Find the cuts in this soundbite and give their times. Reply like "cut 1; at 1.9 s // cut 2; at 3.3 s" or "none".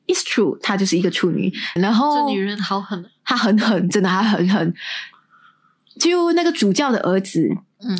cut 1; at 1.8 s